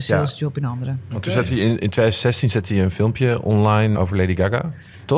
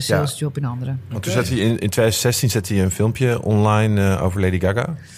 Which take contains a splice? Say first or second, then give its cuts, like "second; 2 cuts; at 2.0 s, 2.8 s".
first; 1 cut; at 3.9 s